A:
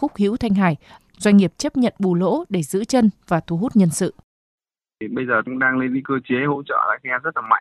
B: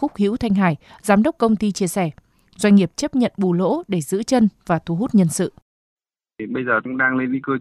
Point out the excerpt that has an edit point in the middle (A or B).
A